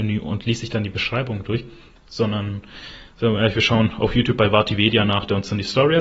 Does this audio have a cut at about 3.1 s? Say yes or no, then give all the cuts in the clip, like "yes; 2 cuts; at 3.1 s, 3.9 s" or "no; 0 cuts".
no; 0 cuts